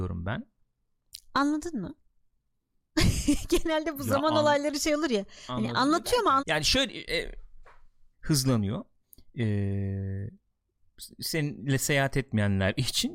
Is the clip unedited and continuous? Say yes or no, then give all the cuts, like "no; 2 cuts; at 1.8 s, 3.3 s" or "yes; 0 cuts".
no; 2 cuts; at 6.4 s, 8.1 s